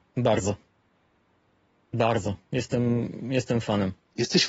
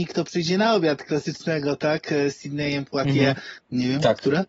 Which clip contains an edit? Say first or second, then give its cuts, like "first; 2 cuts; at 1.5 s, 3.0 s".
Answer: second; 1 cut; at 3.6 s